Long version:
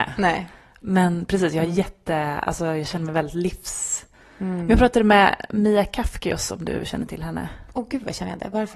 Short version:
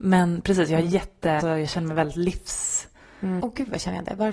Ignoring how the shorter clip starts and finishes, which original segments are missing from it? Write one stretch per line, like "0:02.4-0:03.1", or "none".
0:02.2-0:02.6
0:04.6-0:07.7